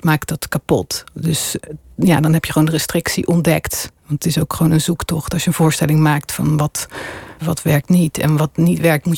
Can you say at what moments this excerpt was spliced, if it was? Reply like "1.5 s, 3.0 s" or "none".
7.4 s

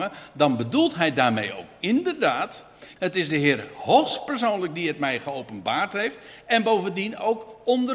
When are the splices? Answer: 3.0 s

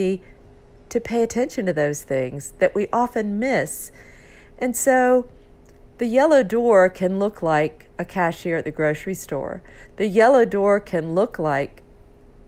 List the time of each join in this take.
none

